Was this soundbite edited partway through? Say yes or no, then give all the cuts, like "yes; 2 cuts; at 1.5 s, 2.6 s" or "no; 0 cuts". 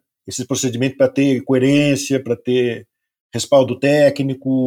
no; 0 cuts